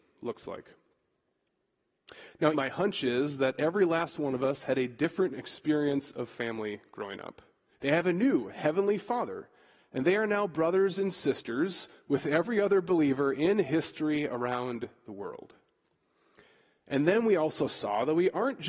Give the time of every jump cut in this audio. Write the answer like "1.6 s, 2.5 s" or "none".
2.5 s, 7.7 s